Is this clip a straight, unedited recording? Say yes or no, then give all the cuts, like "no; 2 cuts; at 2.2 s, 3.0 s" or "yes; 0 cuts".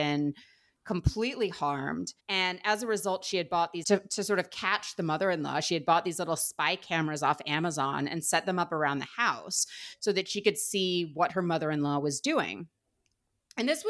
no; 2 cuts; at 2.2 s, 3.8 s